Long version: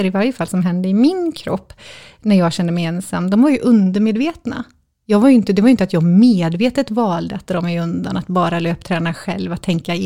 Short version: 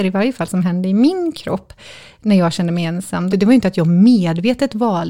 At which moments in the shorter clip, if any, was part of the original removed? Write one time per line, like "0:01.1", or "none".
0:03.3